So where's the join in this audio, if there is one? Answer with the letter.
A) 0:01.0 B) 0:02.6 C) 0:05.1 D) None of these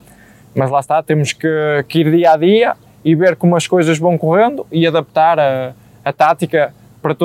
D